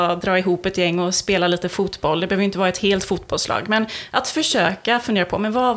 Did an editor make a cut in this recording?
no; 0 cuts

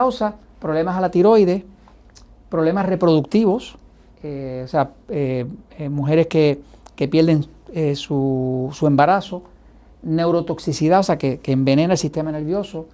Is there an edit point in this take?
no; 0 cuts

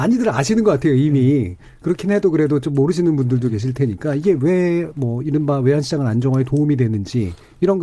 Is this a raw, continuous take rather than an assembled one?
yes; 0 cuts

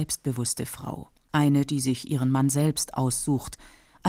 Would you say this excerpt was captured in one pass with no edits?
yes; 0 cuts

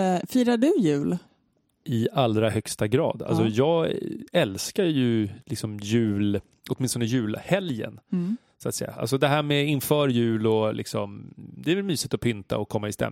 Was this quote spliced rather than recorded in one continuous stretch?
no; 0 cuts

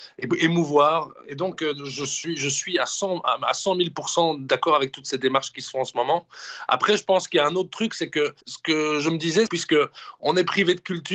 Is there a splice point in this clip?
yes; 2 cuts; at 8.4 s, 9.5 s

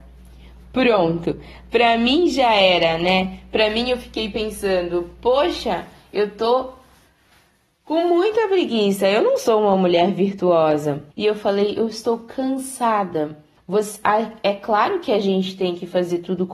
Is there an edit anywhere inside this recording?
yes; 2 cuts; at 11.1 s, 13.6 s

